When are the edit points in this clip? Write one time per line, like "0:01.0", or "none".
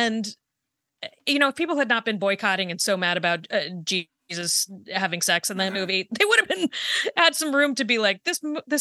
none